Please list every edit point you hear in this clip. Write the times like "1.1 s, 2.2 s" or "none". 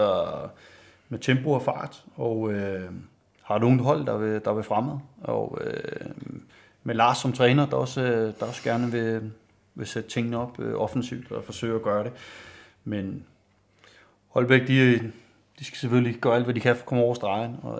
none